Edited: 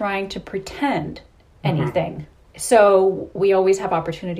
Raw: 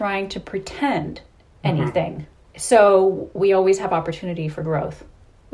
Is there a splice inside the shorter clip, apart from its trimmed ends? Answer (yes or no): no